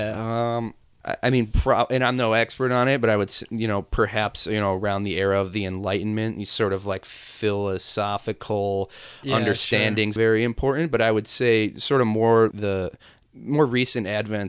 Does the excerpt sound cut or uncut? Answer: cut